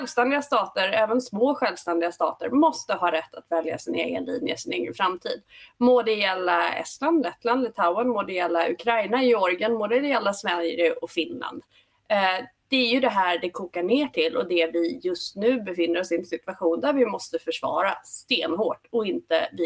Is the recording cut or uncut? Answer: uncut